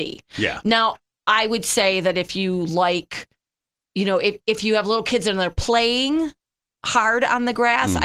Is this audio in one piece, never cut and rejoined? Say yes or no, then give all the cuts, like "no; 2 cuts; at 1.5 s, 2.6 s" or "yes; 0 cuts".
yes; 0 cuts